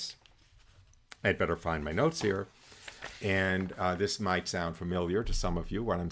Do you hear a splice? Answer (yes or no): no